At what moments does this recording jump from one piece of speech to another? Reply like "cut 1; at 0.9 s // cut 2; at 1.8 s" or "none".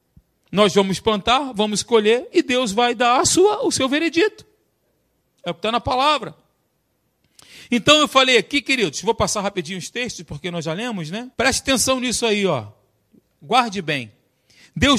cut 1; at 11.3 s